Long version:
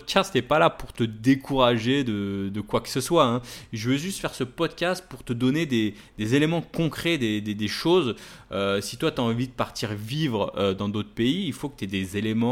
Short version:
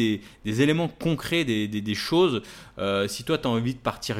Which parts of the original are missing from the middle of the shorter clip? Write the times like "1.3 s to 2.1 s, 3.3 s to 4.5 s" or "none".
none

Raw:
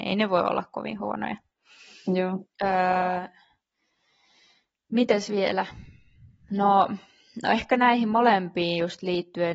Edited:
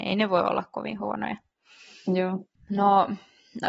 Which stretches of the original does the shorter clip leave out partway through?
2.6 s to 6.4 s

